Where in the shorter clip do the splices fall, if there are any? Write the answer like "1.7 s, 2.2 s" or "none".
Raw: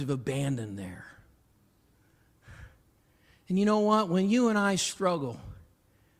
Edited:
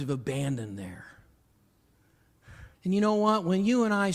2.7 s